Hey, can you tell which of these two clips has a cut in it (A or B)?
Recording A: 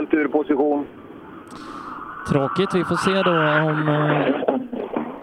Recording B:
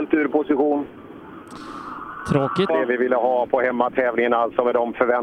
B